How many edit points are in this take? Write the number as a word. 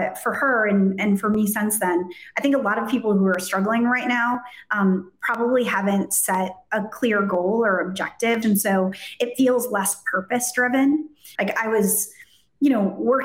two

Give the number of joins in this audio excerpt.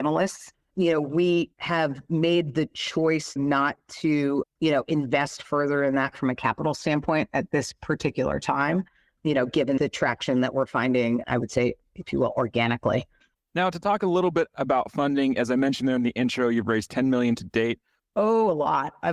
two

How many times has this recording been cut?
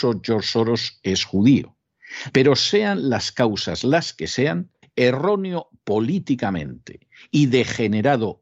two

